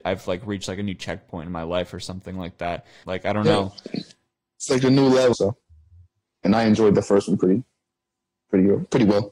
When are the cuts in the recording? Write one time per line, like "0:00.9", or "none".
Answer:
0:03.0
0:05.3